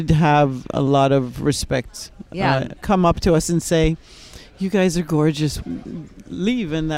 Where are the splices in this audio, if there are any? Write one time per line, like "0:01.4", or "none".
0:02.8
0:05.6